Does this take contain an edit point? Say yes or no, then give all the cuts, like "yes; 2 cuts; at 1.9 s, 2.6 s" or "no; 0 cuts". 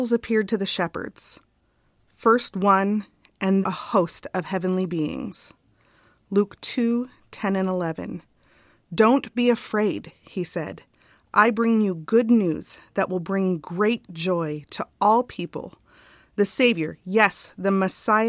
yes; 1 cut; at 3.6 s